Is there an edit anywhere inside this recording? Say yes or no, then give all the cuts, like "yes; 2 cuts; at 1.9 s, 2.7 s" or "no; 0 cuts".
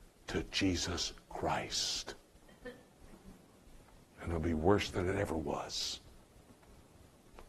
yes; 1 cut; at 4.0 s